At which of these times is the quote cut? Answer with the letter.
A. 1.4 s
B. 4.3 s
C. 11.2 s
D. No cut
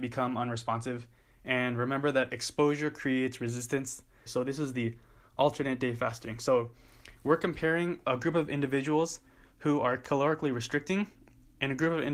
B